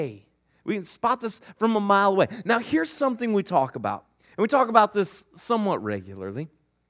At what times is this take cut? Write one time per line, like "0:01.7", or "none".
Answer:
none